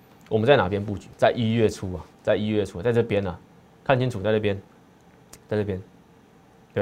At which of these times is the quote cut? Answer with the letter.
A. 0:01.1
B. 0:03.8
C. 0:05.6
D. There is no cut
A